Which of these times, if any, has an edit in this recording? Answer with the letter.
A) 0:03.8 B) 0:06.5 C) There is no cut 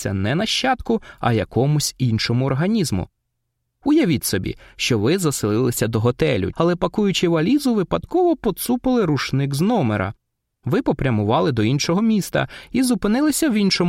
B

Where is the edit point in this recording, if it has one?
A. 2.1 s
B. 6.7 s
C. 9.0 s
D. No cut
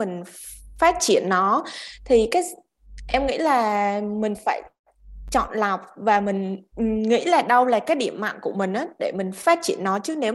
B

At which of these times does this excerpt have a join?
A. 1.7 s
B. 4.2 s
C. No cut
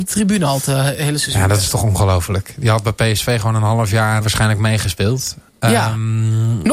B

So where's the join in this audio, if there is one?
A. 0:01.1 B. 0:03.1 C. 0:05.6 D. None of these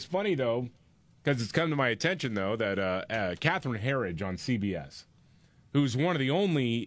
D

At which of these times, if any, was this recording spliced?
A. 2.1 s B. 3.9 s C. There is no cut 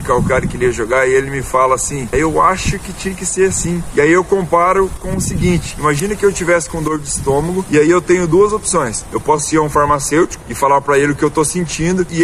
A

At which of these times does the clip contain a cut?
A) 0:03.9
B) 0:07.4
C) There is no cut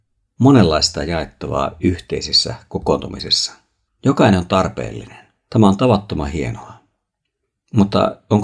A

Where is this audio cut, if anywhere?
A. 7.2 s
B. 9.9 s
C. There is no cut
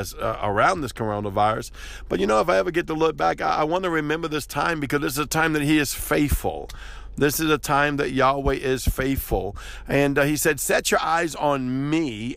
C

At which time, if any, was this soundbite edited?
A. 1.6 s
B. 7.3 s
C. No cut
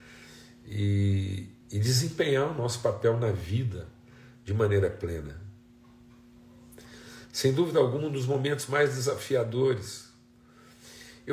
A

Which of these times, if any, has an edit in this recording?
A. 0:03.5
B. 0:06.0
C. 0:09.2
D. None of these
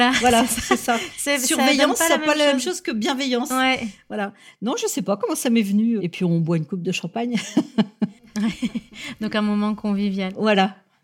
B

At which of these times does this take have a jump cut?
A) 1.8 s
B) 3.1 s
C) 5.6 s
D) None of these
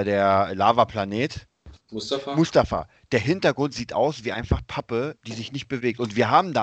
A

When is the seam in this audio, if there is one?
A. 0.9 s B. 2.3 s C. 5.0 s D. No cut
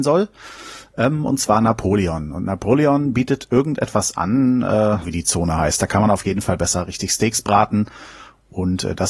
C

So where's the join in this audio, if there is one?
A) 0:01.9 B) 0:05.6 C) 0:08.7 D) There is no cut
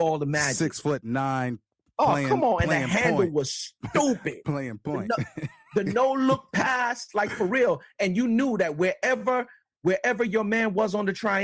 D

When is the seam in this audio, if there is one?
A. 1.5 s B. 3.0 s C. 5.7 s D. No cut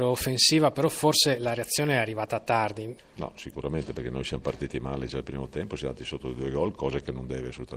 B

